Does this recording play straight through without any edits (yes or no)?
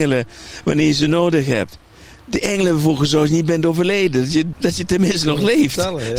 no